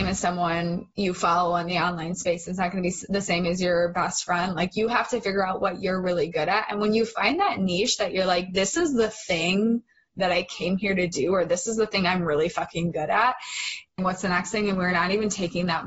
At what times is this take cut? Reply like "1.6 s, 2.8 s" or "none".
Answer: 14.0 s